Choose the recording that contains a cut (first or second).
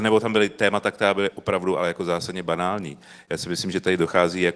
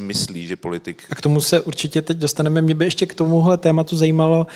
second